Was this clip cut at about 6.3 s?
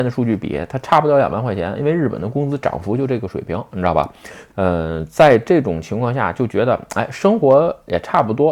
no; 1 cut; at 4.5 s

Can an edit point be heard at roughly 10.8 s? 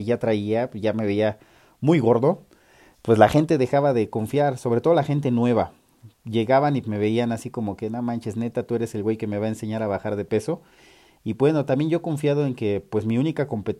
no; 1 cut; at 6.8 s

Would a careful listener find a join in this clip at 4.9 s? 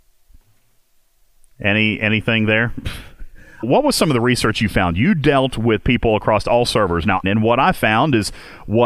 no; 2 cuts; at 3.6 s, 7.2 s

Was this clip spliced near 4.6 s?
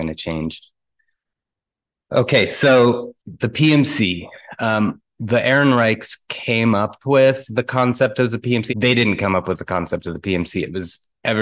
no; 2 cuts; at 3.2 s, 8.7 s

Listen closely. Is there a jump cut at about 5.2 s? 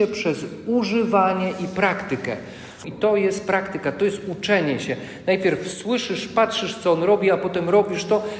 no; 1 cut; at 2.8 s

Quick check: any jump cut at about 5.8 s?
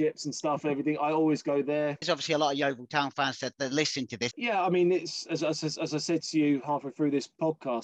no; 2 cuts; at 2.0 s, 4.3 s

